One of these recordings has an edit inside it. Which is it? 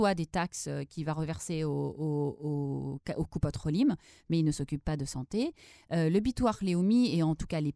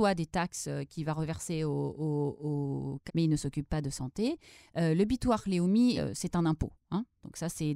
second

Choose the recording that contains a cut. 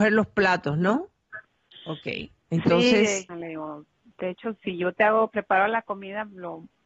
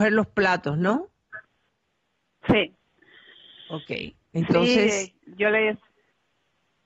first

